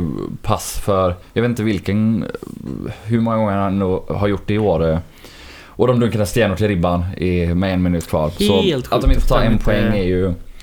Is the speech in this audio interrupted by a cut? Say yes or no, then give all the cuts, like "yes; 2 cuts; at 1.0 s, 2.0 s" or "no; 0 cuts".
no; 0 cuts